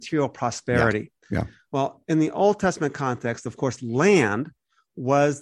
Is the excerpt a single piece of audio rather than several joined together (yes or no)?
yes